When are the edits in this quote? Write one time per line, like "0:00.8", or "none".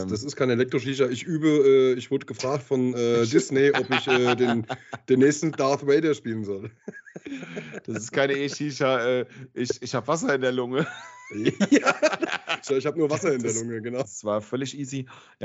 0:12.7
0:14.0